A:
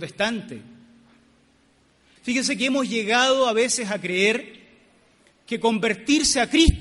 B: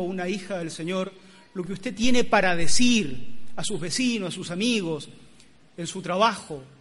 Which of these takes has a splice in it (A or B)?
A